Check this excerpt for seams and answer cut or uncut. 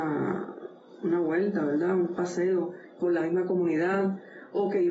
uncut